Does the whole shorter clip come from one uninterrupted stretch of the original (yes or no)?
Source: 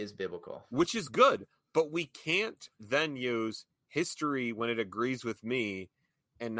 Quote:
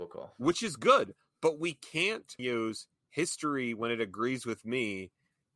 no